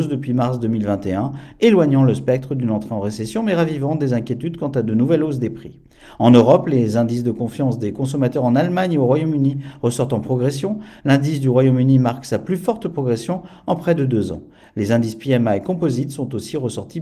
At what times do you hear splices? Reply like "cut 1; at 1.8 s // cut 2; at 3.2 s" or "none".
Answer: none